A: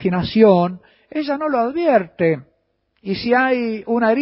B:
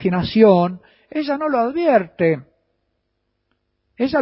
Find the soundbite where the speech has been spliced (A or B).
A